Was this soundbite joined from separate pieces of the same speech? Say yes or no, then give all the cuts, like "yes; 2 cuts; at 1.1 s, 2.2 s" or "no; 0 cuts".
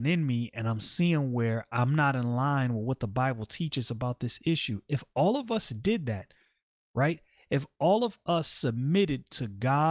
no; 0 cuts